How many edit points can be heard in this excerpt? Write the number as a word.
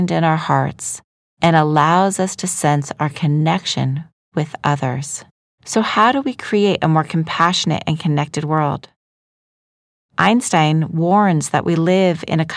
one